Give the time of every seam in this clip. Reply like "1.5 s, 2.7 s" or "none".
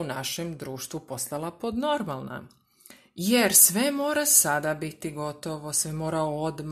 none